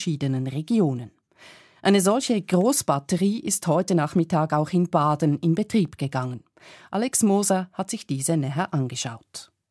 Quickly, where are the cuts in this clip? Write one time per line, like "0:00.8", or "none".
none